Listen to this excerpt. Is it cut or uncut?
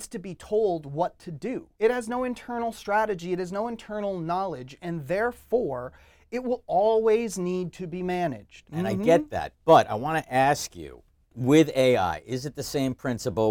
cut